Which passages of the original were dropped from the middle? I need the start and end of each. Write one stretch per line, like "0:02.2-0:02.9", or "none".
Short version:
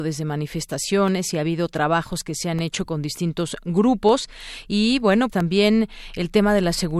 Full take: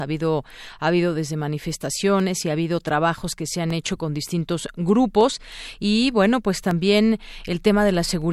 0:06.4-0:06.6